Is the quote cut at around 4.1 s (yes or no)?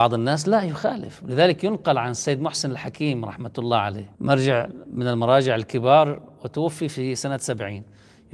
yes